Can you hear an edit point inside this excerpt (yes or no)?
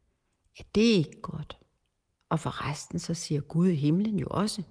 no